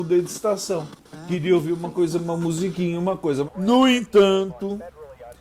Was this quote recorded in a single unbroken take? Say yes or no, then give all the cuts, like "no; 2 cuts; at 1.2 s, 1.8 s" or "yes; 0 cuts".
no; 1 cut; at 3.5 s